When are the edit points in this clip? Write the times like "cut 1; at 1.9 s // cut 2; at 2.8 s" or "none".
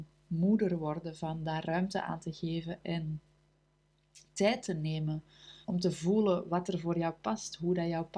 cut 1; at 5.6 s